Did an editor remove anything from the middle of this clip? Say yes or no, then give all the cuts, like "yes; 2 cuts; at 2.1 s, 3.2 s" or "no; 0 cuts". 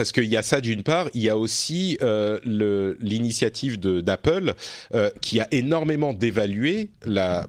no; 0 cuts